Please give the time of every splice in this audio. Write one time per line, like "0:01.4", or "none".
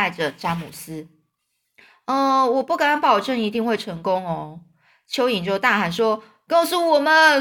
0:01.8